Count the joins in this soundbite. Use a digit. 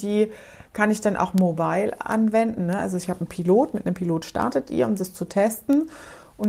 1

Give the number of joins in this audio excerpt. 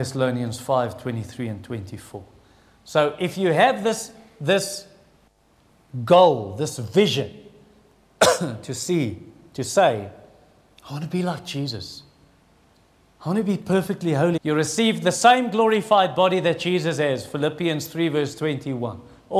1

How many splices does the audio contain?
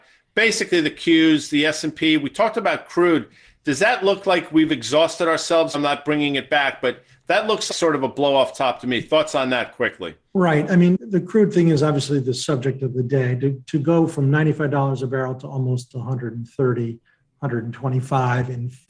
2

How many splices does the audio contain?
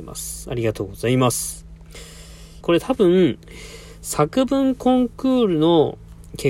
1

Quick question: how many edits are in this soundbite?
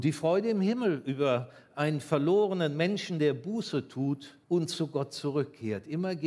1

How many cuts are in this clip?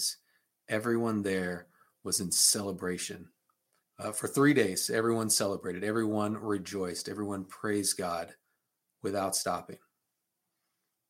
1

